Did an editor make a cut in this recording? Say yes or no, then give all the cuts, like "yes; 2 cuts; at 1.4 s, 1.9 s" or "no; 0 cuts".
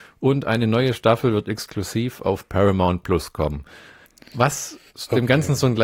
yes; 1 cut; at 4.9 s